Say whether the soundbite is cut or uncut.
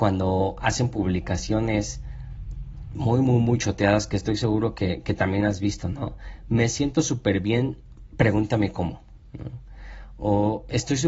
uncut